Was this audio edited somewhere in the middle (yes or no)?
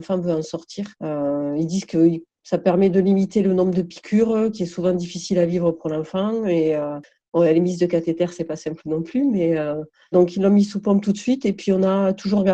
yes